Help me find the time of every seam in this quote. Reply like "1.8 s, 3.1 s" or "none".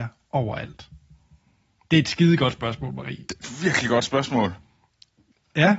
none